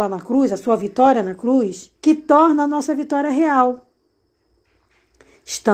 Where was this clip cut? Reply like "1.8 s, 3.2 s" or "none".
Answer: 2.0 s